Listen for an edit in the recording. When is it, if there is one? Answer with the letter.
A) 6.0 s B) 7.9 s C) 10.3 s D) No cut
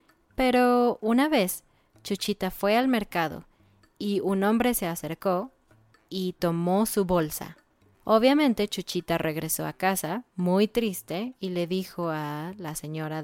B